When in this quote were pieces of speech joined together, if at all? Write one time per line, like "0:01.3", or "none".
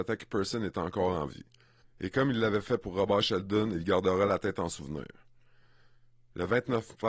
0:01.8